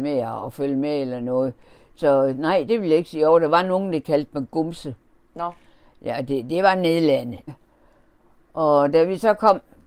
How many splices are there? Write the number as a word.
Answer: one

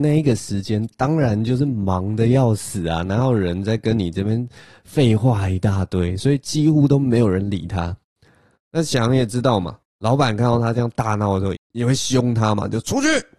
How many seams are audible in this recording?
two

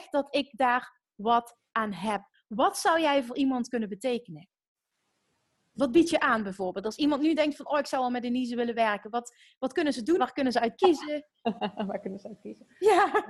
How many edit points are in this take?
one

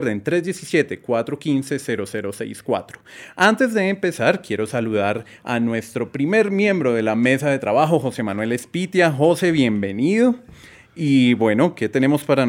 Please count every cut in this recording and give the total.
zero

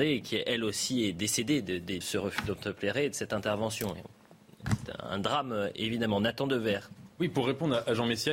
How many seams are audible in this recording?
one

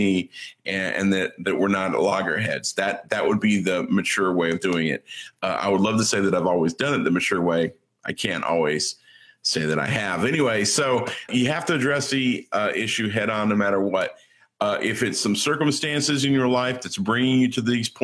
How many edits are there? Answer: one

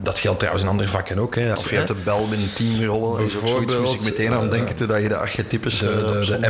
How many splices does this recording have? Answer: one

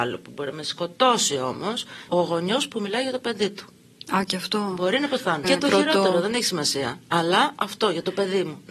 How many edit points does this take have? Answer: two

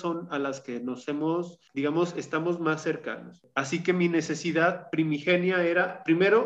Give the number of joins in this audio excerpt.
zero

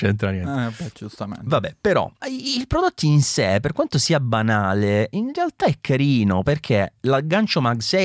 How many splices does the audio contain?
one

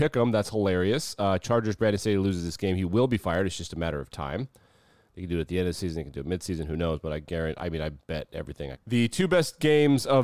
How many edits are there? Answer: one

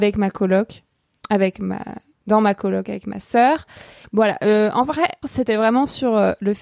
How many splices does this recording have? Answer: two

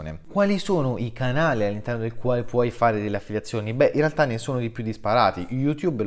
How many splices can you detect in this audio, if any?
zero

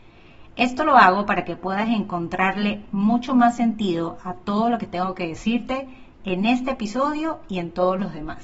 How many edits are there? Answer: zero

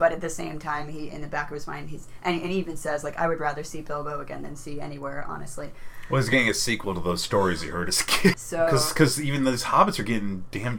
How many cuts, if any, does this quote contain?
one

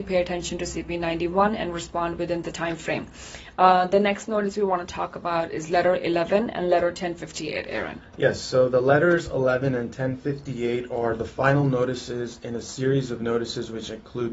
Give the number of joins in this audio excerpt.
zero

